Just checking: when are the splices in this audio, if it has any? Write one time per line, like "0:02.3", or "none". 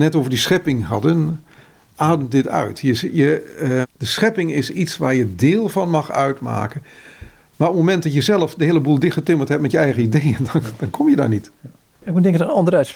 0:03.8